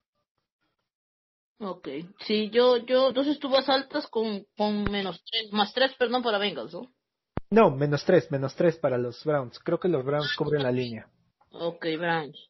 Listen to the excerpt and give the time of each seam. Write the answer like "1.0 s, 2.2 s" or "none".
none